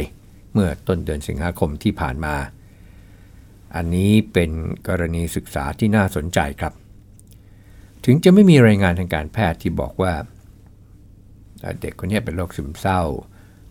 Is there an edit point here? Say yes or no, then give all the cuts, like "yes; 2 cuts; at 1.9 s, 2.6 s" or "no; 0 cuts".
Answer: yes; 1 cut; at 4.8 s